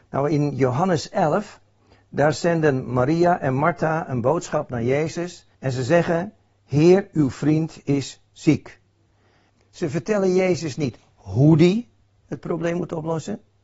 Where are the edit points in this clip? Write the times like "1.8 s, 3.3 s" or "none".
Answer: 5.5 s, 9.5 s